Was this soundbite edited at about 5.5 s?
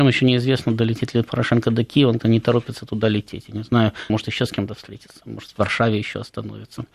no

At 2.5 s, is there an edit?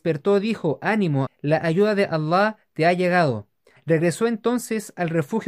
no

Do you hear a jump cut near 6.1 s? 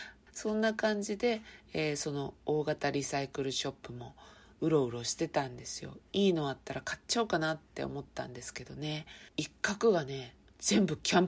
no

